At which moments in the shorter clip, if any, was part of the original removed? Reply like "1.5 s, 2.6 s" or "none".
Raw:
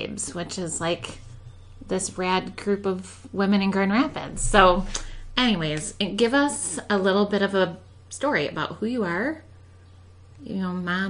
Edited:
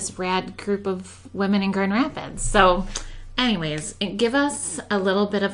none